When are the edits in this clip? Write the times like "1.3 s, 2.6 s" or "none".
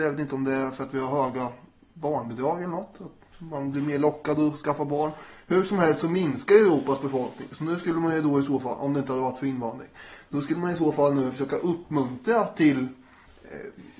none